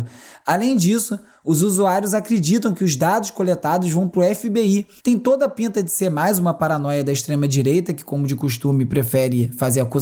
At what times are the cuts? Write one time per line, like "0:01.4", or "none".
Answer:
0:05.0